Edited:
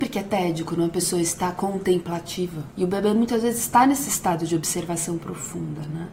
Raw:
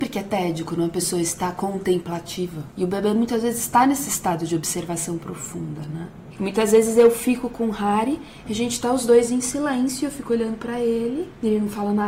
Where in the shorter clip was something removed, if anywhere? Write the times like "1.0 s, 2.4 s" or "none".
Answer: none